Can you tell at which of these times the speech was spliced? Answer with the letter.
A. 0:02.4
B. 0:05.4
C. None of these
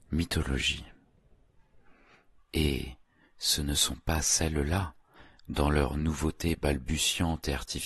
A